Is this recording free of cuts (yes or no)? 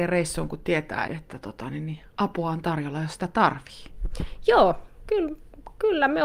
no